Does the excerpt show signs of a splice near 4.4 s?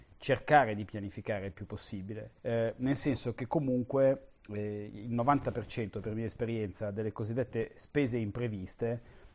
no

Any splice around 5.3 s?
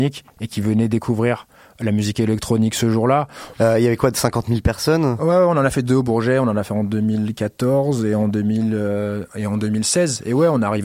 no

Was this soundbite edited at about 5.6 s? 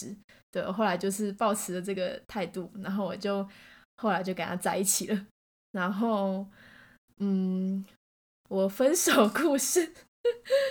yes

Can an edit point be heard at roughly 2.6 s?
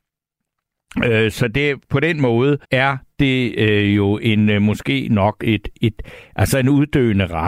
yes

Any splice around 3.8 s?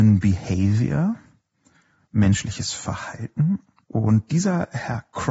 yes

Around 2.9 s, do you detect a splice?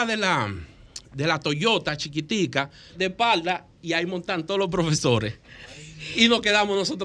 yes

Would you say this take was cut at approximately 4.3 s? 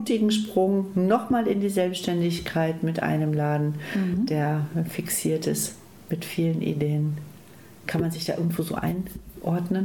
no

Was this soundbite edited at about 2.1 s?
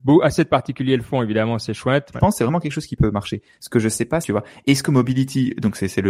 yes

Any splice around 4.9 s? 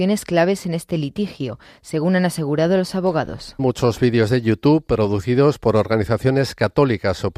no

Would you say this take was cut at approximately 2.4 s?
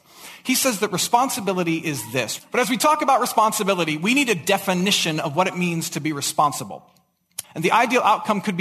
yes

